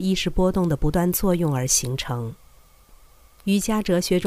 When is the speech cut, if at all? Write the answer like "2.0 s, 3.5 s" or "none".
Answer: 3.3 s